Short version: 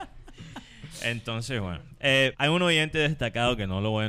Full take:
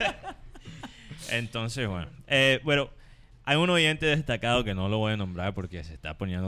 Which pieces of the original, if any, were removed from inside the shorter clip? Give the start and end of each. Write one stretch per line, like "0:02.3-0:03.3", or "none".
0:02.6-0:03.4

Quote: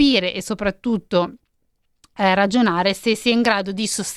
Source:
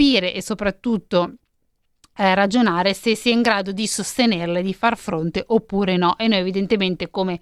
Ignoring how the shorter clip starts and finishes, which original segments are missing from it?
none

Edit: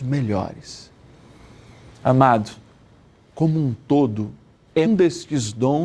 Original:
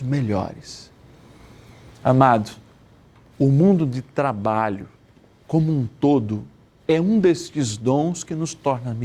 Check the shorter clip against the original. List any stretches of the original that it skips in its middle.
0:03.1-0:05.3
0:07.0-0:07.1

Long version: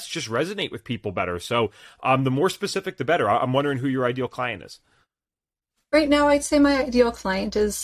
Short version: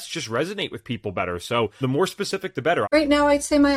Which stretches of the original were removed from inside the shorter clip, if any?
0:01.8-0:02.2
0:03.3-0:05.8

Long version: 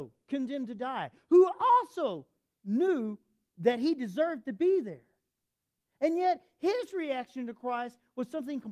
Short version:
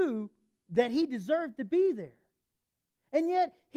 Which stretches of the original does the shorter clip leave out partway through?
none

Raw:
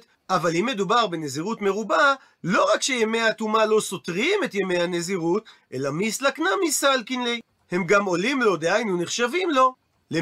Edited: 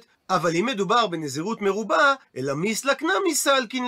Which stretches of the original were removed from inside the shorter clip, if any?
0:02.2-0:05.6

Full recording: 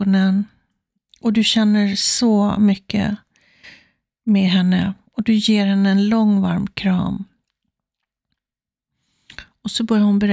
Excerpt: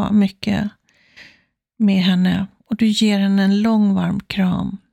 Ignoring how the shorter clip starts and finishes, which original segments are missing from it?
none

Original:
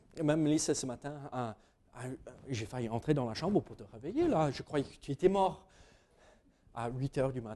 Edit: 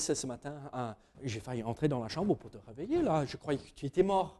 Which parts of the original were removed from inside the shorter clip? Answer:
0:01.7-0:02.4

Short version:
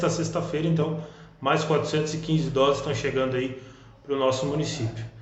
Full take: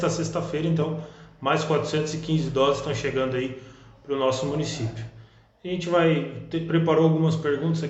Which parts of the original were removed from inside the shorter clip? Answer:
none

